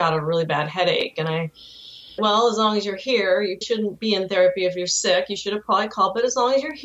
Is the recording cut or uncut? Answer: cut